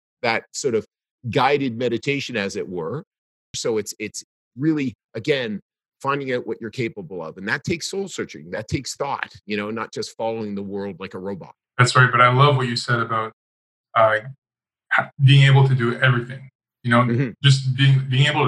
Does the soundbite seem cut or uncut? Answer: cut